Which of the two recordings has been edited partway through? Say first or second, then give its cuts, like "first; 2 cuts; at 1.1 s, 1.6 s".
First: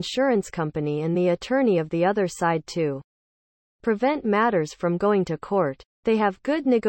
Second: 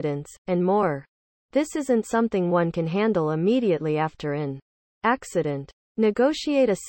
first; 1 cut; at 5.9 s